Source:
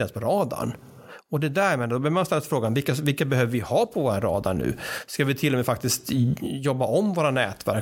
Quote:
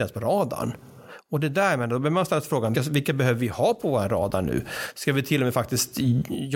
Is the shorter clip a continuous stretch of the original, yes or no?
no